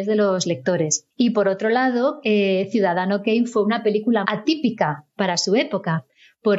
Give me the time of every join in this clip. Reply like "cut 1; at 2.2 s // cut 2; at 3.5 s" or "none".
cut 1; at 1.1 s // cut 2; at 2.2 s // cut 3; at 4.2 s

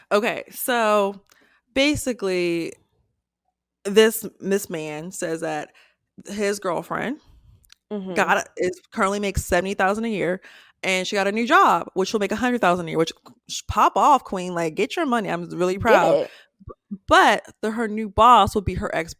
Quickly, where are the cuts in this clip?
none

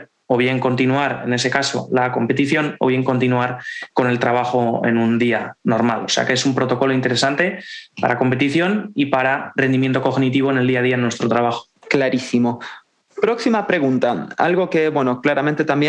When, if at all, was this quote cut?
none

